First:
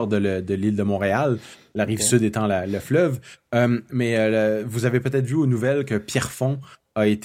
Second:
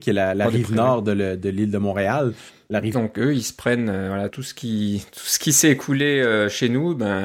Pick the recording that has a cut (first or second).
second